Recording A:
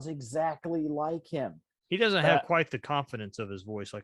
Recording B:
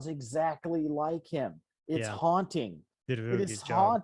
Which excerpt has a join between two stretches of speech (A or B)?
A